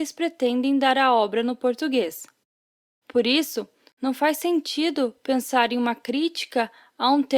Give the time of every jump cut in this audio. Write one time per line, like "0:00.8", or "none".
0:03.9